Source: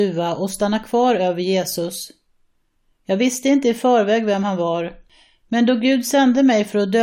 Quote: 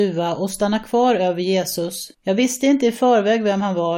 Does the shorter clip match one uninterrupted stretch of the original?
no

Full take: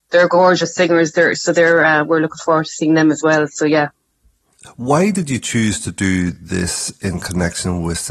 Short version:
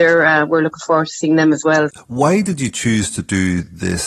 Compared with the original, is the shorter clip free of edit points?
no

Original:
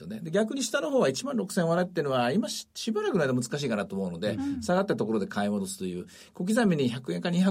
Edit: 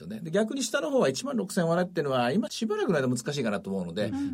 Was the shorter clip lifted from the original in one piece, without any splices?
no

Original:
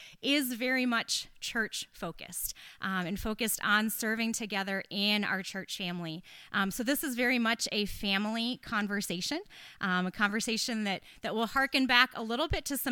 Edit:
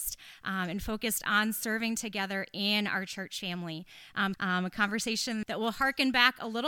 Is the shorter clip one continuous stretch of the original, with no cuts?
no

